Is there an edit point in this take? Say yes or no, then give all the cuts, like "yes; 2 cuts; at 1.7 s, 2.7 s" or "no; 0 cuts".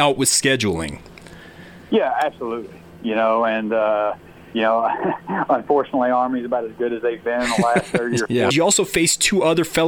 yes; 1 cut; at 8.5 s